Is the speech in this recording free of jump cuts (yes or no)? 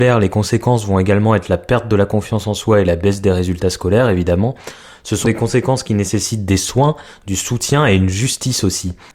no